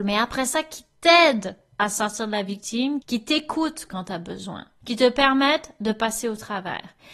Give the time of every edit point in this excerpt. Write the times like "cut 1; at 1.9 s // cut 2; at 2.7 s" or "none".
cut 1; at 3.0 s